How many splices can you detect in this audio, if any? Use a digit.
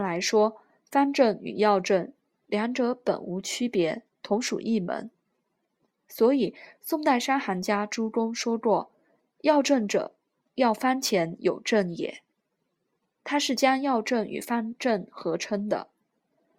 0